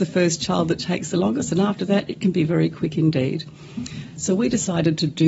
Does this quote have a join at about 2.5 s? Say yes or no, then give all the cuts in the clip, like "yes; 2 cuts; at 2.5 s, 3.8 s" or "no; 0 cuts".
yes; 2 cuts; at 2.5 s, 4.2 s